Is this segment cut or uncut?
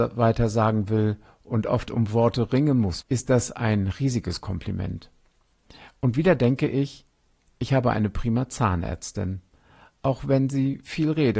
cut